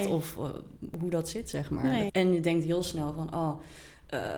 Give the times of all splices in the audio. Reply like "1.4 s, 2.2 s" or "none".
2.1 s